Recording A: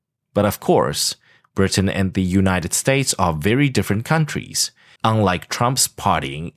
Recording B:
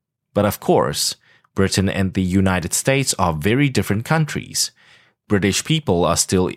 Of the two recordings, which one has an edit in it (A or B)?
A